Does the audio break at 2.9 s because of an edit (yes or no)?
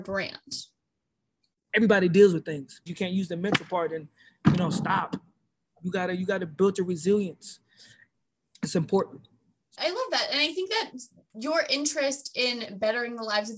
yes